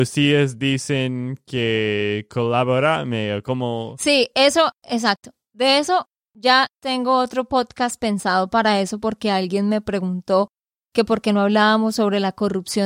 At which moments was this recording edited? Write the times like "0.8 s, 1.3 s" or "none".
none